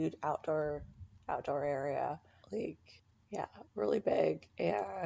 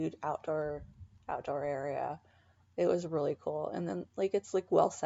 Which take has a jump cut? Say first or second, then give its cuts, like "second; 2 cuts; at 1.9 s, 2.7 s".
first; 1 cut; at 2.4 s